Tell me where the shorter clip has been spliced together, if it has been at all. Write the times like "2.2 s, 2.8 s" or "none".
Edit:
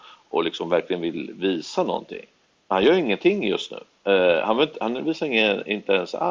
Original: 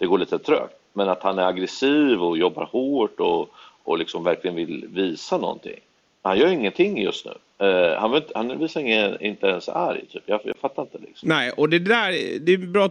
none

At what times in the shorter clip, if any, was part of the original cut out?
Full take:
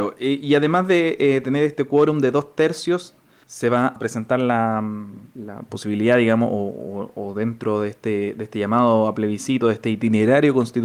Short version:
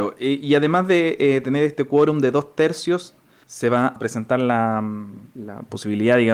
none

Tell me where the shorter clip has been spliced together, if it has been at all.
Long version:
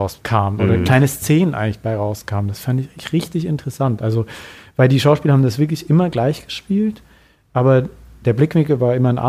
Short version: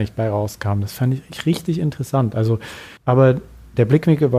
3.0 s

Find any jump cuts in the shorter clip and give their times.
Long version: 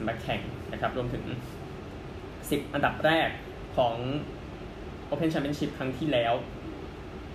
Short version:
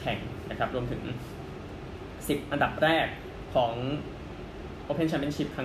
none

